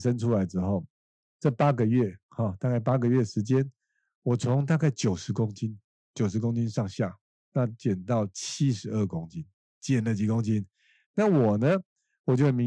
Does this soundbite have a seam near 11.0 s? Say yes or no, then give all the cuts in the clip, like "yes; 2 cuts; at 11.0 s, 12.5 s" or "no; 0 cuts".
yes; 1 cut; at 11.0 s